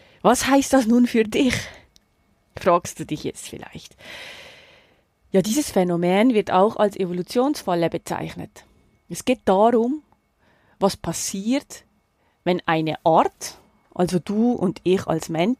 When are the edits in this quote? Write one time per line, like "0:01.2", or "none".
none